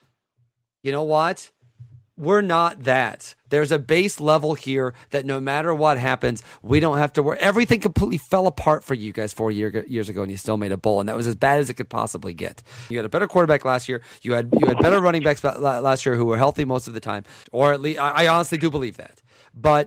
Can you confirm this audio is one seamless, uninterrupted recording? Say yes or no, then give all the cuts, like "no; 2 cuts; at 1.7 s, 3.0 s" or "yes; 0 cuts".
no; 2 cuts; at 12.9 s, 17.4 s